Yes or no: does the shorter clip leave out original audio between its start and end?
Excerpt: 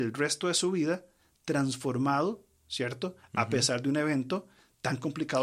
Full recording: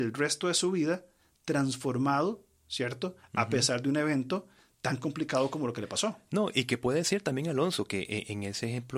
no